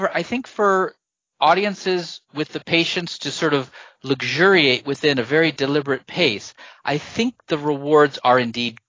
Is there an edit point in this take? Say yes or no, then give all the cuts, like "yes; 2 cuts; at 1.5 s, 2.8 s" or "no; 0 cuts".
no; 0 cuts